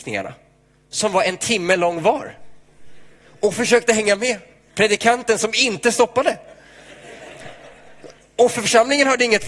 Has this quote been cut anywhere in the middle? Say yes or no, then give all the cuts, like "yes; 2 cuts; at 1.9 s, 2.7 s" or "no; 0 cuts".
yes; 1 cut; at 8.2 s